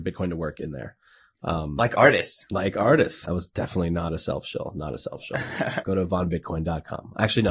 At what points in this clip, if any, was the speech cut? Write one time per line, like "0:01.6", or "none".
0:03.2
0:05.8